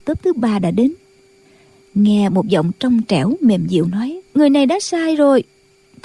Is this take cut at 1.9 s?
no; 1 cut; at 4.3 s

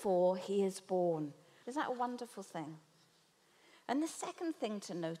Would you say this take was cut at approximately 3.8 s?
no; 1 cut; at 1.6 s

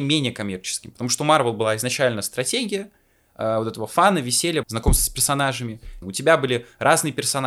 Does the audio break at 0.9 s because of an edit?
no; 2 cuts; at 4.6 s, 6.0 s

